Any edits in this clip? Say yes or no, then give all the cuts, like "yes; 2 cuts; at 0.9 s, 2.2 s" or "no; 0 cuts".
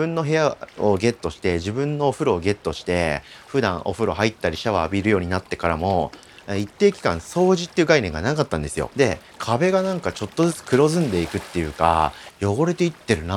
yes; 1 cut; at 8.9 s